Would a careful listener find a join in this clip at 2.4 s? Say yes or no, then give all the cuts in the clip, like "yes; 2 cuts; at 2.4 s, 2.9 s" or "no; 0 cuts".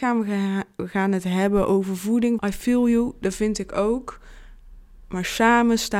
yes; 1 cut; at 2.4 s